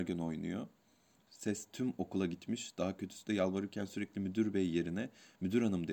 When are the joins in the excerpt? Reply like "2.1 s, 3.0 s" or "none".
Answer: 1.3 s